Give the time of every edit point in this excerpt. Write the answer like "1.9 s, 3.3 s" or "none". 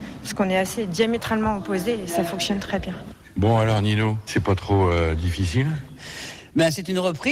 4.3 s